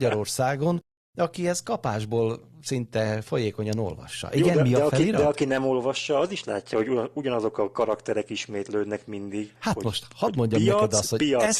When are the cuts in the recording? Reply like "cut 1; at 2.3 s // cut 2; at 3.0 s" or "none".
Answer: none